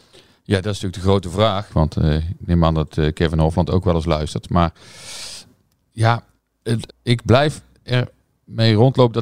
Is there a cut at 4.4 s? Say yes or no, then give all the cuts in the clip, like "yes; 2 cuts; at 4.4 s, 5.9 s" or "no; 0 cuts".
no; 2 cuts; at 1.7 s, 6.9 s